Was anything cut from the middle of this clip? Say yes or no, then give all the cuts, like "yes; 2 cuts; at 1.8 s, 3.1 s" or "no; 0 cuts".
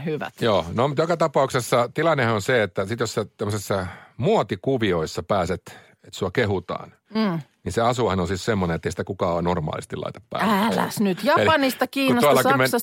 no; 0 cuts